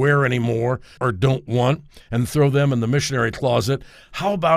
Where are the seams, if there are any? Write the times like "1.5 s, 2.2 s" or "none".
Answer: 1.0 s